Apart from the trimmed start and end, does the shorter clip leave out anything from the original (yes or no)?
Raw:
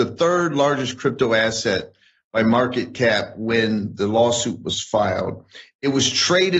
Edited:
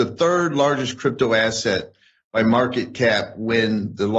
no